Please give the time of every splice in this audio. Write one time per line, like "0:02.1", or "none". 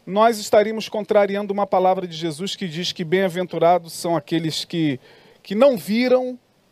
none